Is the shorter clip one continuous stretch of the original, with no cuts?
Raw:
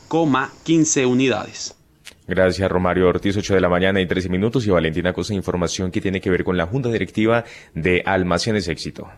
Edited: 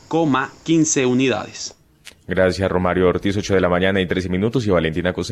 yes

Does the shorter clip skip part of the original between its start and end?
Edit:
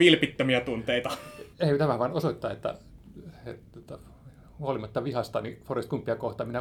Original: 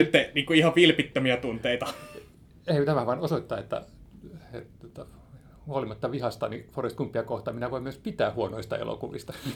yes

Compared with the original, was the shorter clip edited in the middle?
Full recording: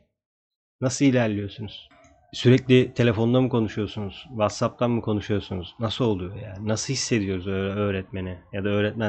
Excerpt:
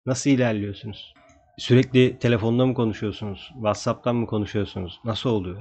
no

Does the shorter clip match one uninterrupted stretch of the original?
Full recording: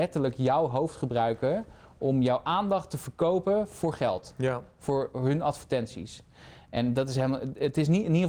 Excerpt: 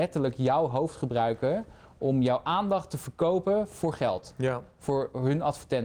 yes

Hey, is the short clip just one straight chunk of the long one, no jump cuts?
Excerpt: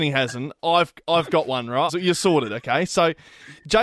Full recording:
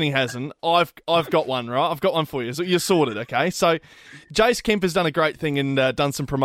no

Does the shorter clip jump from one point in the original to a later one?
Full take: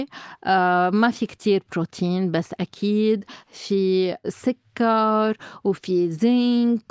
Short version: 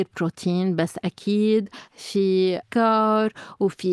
yes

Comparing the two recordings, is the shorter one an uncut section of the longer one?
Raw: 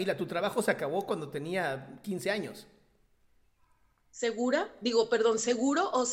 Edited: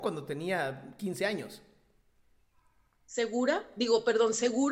yes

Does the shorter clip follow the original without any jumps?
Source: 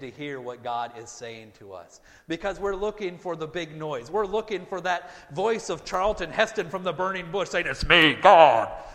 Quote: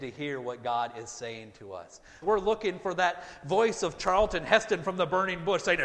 no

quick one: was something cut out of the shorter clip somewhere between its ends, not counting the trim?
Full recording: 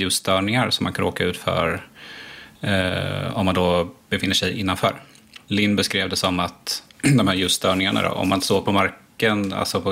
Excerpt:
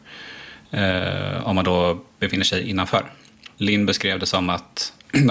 no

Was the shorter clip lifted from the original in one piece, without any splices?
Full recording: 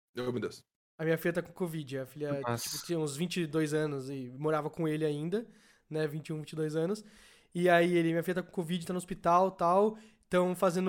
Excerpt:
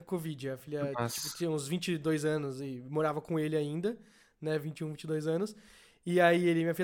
yes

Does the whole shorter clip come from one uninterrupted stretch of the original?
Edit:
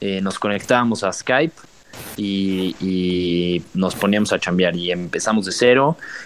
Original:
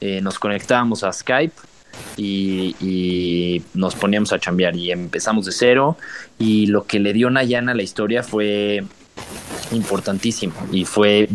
yes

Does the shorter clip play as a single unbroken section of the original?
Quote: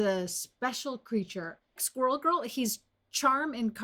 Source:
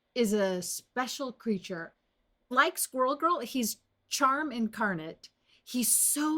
no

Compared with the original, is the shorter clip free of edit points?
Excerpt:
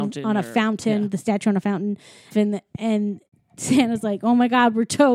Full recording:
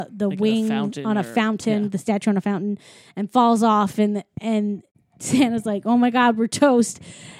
no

